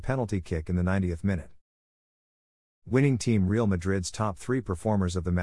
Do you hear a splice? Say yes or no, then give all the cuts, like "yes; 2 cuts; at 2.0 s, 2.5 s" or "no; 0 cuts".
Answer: no; 0 cuts